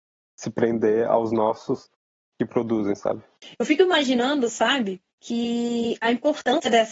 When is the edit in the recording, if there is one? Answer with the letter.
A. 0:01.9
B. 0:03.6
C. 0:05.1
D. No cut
C